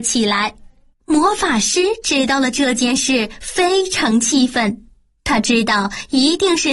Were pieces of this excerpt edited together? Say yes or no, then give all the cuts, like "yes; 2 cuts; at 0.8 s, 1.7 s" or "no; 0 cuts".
yes; 1 cut; at 0.9 s